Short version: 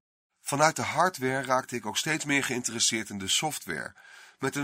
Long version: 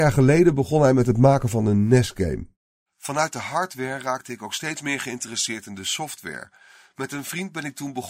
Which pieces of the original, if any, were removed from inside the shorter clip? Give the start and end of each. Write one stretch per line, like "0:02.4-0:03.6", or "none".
none